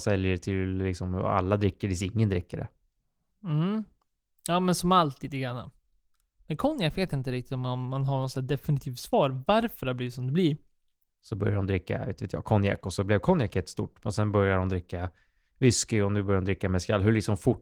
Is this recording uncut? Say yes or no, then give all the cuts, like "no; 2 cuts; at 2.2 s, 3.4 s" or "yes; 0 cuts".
no; 1 cut; at 11.1 s